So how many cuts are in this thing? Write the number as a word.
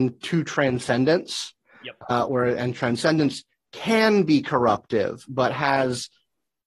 one